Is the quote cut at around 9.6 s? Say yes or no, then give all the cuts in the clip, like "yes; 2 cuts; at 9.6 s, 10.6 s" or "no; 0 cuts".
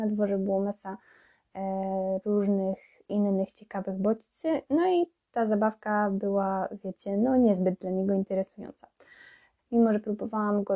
yes; 1 cut; at 9.6 s